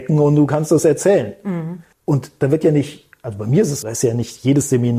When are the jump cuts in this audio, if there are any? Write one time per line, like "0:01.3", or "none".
0:01.9
0:03.8